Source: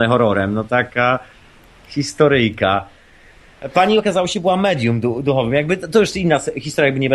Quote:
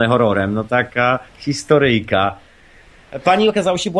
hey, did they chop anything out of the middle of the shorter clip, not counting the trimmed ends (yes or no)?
yes